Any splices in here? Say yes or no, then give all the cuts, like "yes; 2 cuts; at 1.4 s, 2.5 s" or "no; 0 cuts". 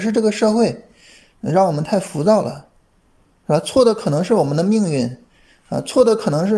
no; 0 cuts